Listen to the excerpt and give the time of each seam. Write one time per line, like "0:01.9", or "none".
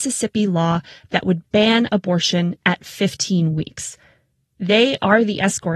0:04.5

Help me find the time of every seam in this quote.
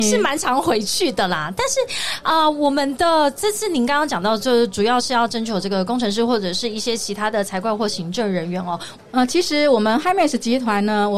0:09.0

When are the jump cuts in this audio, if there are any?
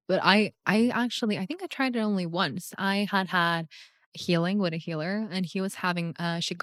none

